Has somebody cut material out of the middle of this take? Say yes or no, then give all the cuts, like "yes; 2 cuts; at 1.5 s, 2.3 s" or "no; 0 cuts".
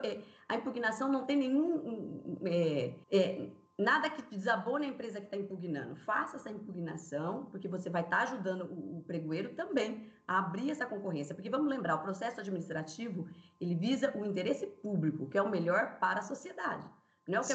yes; 1 cut; at 3.0 s